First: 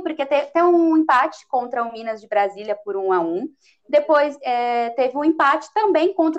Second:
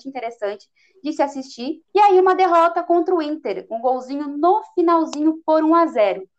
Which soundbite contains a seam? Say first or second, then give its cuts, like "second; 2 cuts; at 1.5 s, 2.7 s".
second; 1 cut; at 1.9 s